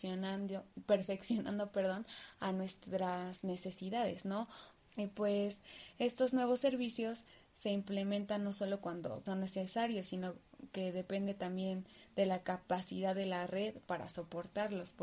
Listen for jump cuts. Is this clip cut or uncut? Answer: cut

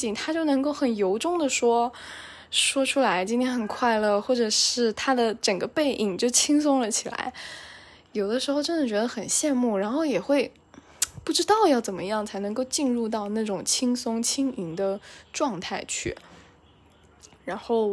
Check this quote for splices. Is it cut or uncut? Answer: uncut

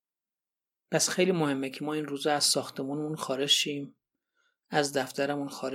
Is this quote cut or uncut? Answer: uncut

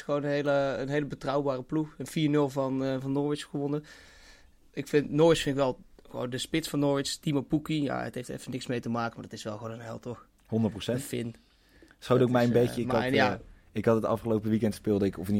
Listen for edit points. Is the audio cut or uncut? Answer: uncut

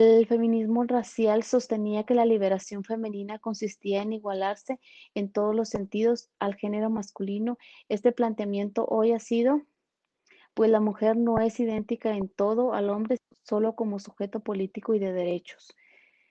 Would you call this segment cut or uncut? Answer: cut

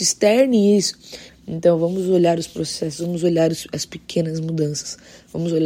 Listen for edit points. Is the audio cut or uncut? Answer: cut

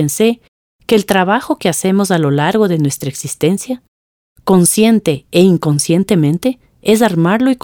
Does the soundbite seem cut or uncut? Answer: uncut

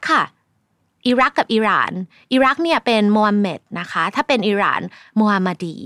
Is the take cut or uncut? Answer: uncut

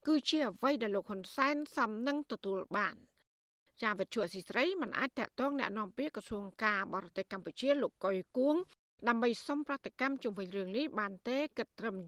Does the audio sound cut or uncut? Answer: uncut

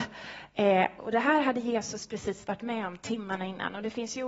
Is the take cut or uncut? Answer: cut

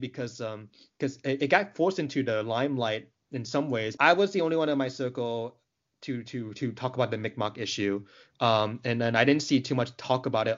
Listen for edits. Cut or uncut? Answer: cut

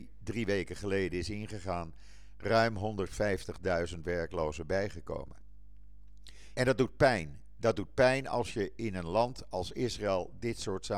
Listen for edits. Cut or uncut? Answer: cut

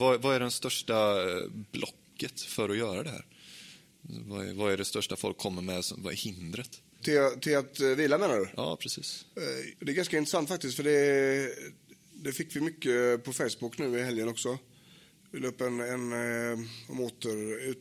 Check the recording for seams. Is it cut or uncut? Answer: uncut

